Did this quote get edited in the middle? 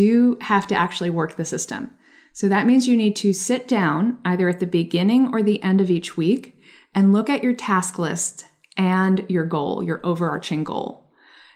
no; 0 cuts

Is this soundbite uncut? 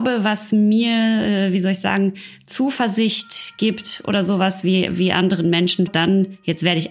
no; 1 cut; at 5.9 s

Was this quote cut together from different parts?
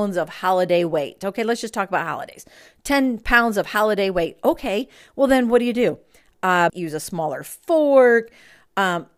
yes; 1 cut; at 6.7 s

